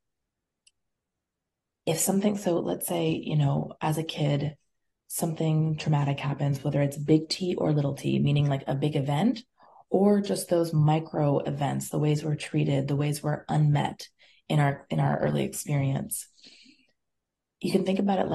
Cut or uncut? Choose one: uncut